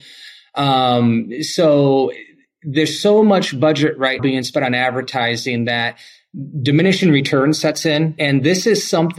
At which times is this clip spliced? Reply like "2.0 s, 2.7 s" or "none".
4.2 s, 8.2 s